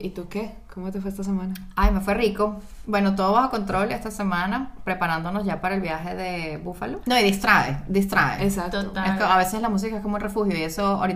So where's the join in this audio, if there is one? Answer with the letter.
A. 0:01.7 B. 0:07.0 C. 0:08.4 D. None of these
B